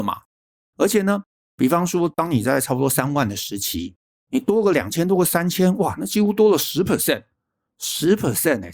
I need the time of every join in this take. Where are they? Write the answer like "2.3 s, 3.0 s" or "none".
none